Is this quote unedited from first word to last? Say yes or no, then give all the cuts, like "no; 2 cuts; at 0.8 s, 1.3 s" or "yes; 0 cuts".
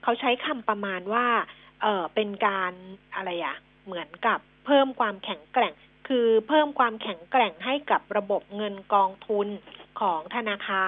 yes; 0 cuts